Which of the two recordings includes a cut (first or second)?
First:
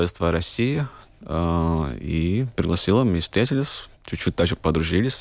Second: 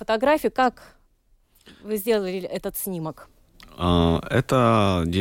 first